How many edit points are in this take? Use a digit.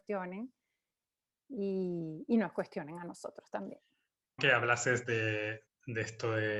2